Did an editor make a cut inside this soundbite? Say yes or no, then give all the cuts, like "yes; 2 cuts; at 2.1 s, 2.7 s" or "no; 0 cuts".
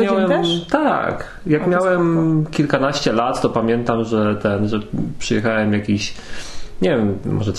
no; 0 cuts